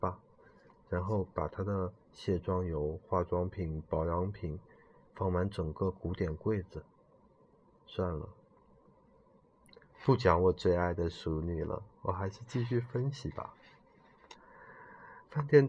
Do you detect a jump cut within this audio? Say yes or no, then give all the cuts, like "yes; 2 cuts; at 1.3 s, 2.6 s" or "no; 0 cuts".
no; 0 cuts